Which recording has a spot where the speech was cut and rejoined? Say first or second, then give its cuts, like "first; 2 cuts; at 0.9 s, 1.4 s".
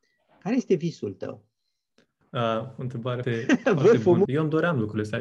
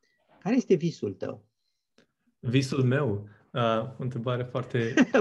first; 3 cuts; at 2.2 s, 3.2 s, 4.3 s